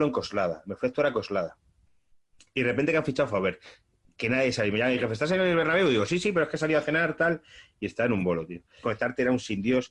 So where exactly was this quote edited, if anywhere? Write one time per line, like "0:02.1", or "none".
0:08.8